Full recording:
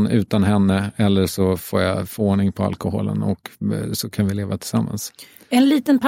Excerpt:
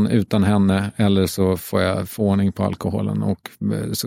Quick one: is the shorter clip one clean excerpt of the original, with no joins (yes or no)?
yes